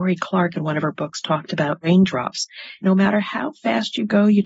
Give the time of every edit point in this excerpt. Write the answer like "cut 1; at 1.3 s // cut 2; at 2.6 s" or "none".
cut 1; at 2.8 s

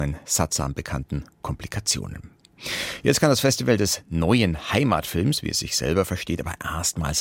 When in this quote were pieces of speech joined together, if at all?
none

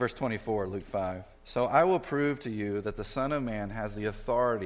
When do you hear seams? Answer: cut 1; at 1.3 s

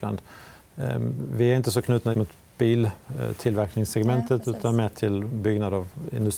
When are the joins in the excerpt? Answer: cut 1; at 2.1 s

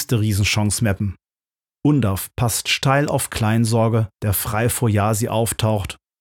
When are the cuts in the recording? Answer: cut 1; at 4.1 s

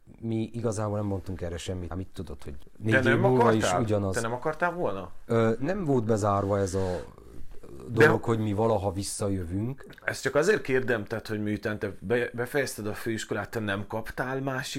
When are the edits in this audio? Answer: cut 1; at 1.9 s

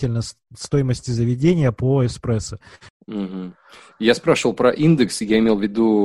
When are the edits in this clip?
cut 1; at 2.9 s

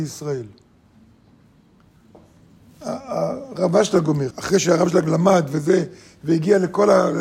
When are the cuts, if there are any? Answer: cut 1; at 4.3 s

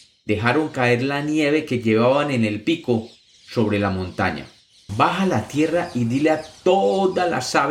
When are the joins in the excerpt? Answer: cut 1; at 4.9 s

